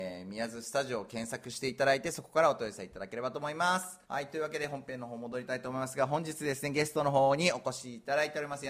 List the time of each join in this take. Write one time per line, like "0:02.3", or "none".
0:04.0